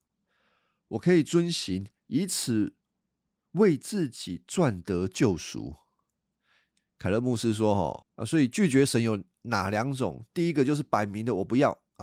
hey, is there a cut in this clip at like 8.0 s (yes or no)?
yes